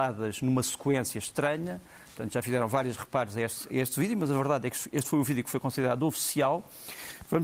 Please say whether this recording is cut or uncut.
uncut